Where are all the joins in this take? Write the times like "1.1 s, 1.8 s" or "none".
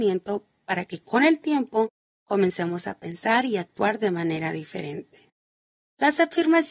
none